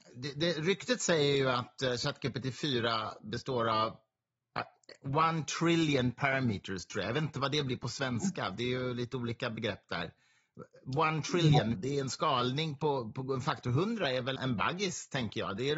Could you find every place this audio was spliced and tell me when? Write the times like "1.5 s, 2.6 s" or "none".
11.7 s, 14.4 s